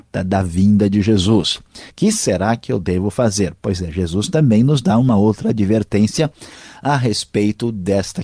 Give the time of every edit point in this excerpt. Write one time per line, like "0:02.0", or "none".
0:01.9